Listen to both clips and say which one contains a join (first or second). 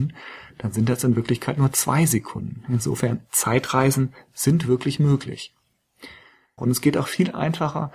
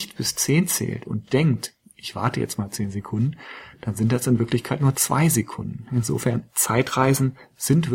first